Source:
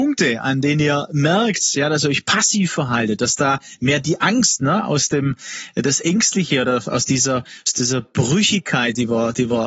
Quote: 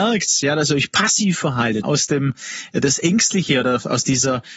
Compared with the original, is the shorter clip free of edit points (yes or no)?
no